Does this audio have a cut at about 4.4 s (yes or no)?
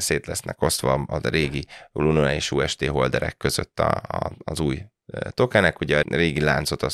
no